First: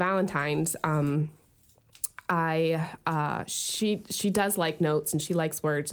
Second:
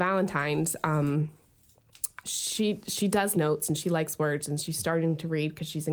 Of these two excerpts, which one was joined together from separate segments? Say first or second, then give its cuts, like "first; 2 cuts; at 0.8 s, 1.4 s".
second; 2 cuts; at 2.2 s, 3.3 s